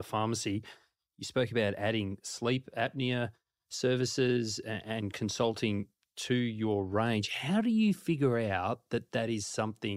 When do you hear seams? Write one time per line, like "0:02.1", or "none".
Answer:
none